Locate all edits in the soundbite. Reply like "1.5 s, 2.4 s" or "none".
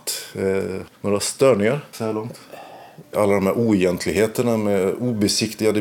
0.9 s, 3.0 s